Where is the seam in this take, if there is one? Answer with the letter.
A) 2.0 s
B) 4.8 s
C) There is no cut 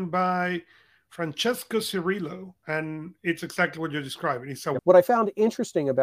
B